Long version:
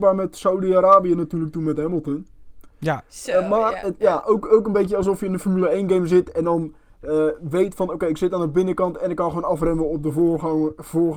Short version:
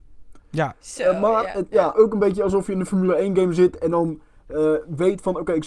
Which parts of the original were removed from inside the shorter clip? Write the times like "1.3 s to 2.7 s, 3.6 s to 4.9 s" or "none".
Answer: 4.2 s to 4.5 s